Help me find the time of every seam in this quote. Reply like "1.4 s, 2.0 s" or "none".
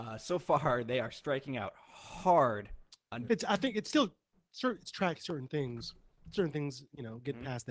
3.3 s